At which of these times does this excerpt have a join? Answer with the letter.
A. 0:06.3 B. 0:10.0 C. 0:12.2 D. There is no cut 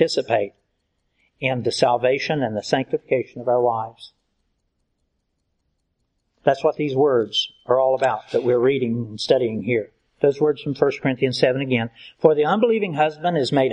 D